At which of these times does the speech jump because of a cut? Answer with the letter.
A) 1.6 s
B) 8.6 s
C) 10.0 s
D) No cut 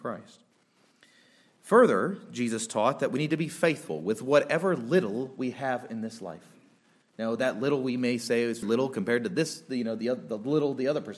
B